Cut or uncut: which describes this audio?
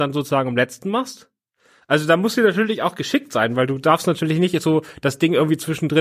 uncut